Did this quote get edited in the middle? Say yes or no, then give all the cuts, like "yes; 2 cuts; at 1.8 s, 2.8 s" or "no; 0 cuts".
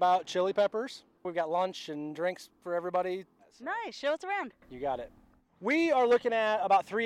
yes; 1 cut; at 1.2 s